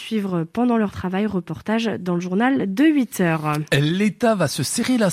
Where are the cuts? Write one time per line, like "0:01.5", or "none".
none

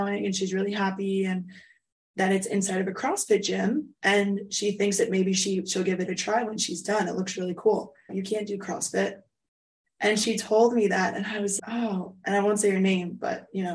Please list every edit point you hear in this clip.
0:08.1
0:11.6

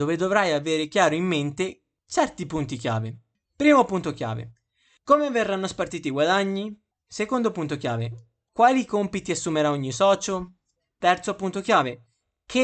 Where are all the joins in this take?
none

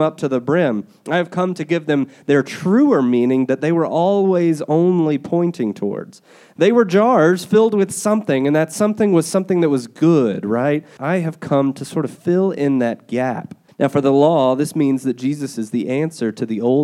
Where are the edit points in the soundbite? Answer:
0:11.0
0:13.7

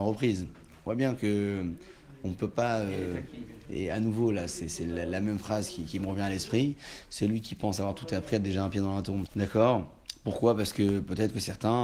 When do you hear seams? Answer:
0:03.6
0:09.3

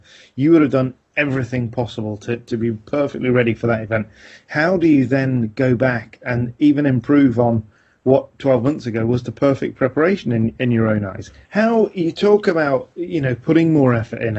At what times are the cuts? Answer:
0:11.4

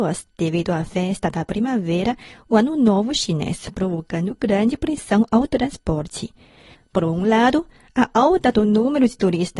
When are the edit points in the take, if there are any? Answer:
0:06.7

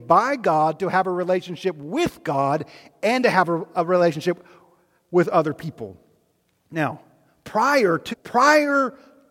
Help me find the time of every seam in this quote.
0:08.1

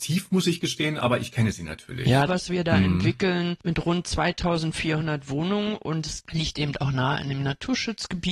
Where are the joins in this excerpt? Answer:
0:02.3

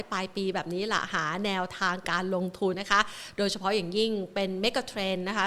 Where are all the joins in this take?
0:02.7

